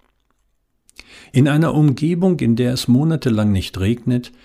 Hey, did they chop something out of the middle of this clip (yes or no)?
yes